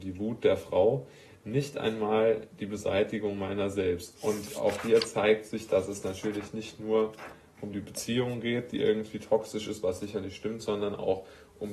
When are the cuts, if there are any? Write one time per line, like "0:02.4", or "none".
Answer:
0:04.2